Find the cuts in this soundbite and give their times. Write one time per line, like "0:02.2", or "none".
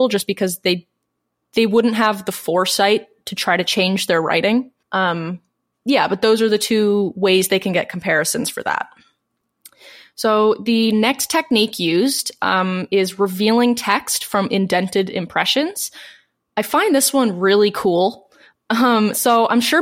0:04.8